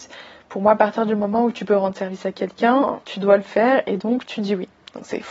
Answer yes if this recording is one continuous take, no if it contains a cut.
yes